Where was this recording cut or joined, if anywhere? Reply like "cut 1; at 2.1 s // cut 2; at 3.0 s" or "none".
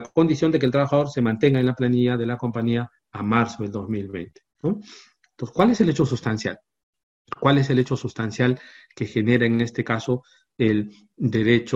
none

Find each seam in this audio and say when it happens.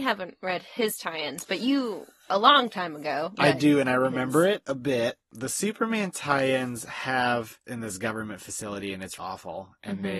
cut 1; at 7.6 s // cut 2; at 9.2 s

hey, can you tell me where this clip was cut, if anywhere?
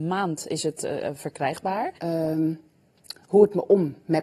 cut 1; at 2.0 s

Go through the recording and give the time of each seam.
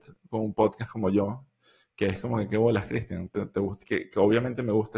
none

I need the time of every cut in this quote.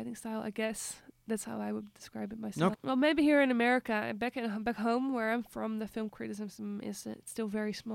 cut 1; at 2.7 s

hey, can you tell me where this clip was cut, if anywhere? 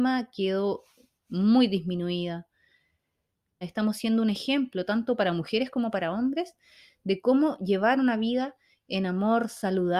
cut 1; at 3.6 s

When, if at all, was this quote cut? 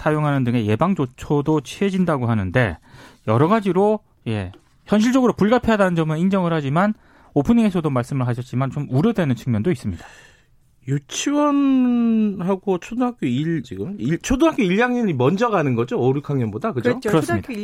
cut 1; at 13.6 s

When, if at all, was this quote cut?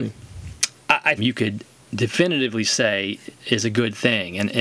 cut 1; at 1.2 s // cut 2; at 3.3 s

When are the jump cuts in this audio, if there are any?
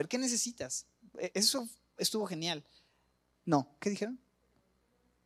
cut 1; at 3.3 s

